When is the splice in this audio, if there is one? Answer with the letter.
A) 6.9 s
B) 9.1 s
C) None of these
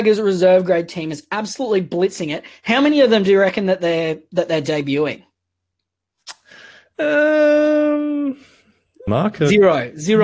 B